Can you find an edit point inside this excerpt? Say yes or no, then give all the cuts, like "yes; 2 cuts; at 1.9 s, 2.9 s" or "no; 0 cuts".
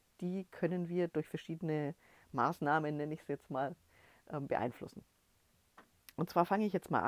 no; 0 cuts